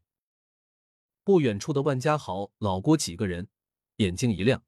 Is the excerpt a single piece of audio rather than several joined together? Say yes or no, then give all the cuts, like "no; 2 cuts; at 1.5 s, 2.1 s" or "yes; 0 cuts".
yes; 0 cuts